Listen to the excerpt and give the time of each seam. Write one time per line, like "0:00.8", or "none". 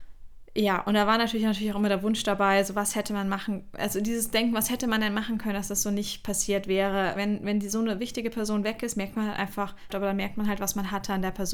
0:07.2
0:09.9